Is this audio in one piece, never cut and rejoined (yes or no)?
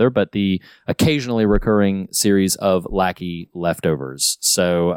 yes